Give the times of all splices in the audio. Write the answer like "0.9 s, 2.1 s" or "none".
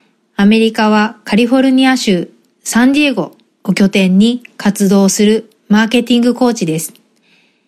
none